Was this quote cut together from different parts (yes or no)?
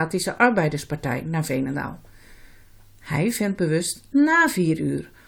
no